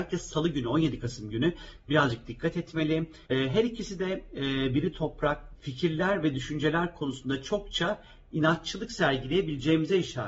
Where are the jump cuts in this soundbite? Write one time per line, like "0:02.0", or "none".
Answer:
0:03.3
0:05.6

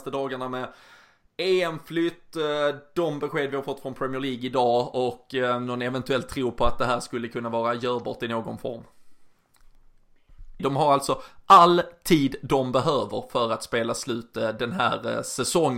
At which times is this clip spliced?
0:10.6

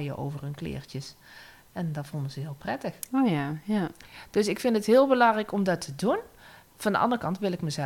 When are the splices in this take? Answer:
none

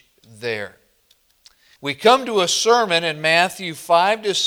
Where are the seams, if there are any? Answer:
0:01.8

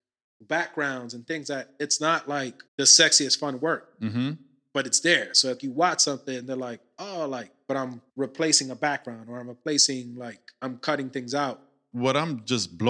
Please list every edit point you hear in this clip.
0:02.7
0:05.6
0:08.1

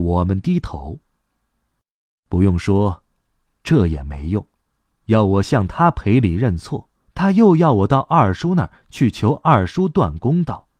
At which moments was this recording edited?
0:05.0
0:07.1

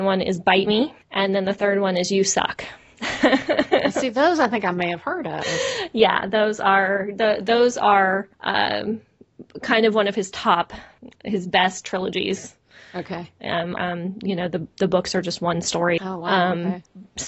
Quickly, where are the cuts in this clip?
0:13.8
0:16.0

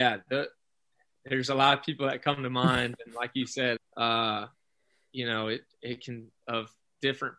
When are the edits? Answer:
0:03.8
0:06.4

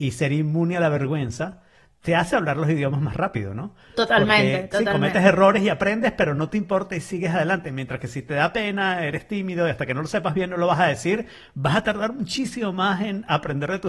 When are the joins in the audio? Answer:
none

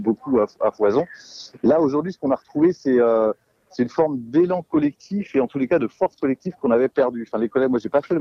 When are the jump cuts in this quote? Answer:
none

